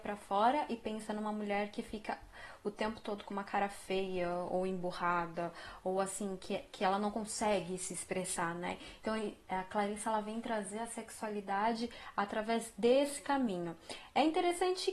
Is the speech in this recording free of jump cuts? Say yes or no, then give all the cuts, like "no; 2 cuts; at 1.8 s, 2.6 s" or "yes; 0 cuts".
yes; 0 cuts